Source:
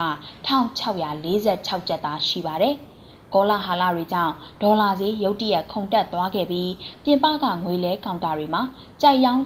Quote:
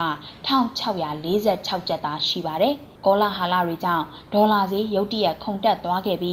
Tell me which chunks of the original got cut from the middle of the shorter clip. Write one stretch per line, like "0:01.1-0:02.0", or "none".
0:03.0-0:03.2